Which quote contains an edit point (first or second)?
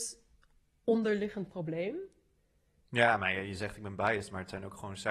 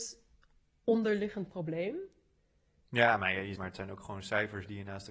second